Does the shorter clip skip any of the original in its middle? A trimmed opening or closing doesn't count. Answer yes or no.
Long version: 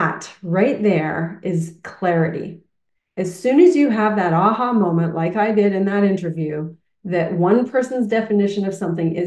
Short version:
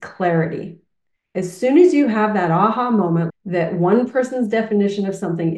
yes